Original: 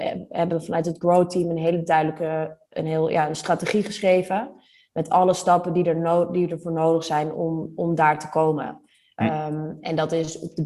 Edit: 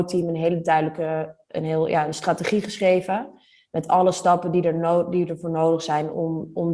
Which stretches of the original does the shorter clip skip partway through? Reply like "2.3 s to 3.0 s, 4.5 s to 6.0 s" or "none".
none